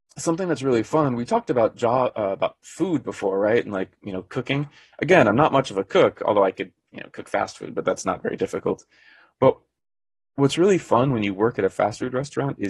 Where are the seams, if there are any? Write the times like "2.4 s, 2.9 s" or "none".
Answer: none

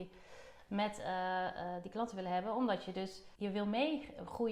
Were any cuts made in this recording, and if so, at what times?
3.3 s

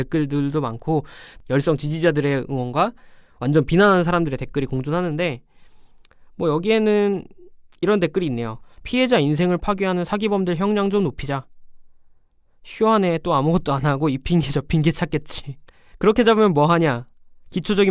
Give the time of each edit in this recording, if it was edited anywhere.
none

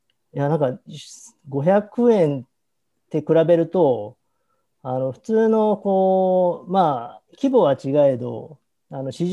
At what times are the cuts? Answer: none

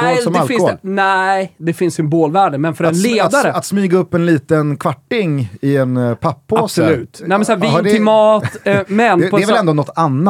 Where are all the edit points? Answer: none

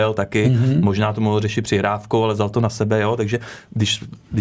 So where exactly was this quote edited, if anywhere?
none

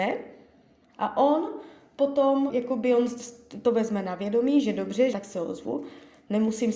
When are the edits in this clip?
2.5 s, 5.1 s

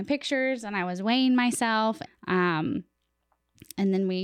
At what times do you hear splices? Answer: 2.1 s

